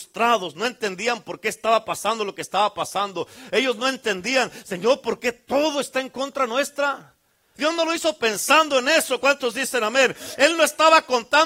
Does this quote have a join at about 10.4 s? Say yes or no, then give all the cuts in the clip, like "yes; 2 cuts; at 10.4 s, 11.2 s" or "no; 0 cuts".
no; 1 cut; at 7.6 s